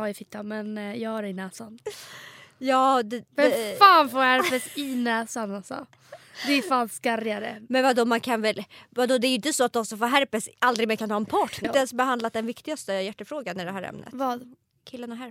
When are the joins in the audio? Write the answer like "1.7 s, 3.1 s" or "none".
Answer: 11.6 s